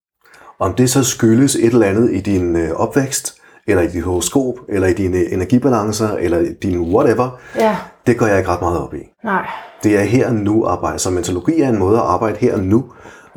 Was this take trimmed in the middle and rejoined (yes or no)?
yes